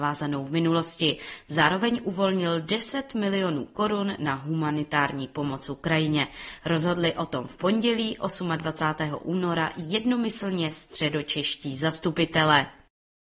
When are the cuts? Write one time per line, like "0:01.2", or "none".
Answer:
none